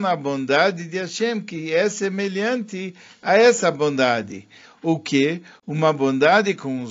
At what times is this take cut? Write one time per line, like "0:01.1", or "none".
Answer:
none